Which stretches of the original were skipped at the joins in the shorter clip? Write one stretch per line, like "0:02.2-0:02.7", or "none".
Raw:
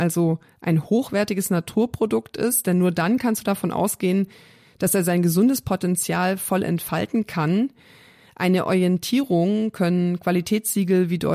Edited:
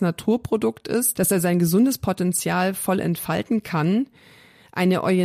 0:02.6-0:04.8